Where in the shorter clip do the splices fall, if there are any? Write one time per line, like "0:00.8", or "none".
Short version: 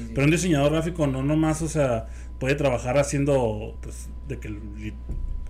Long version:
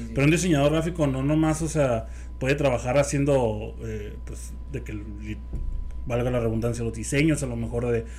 0:03.8